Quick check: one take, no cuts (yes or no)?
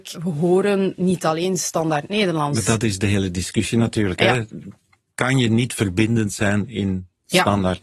yes